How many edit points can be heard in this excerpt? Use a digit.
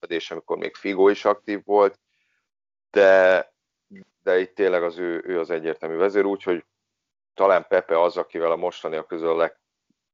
1